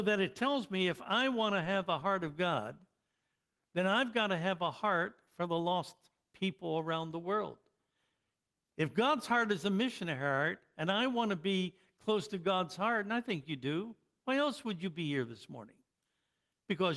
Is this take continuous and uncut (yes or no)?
yes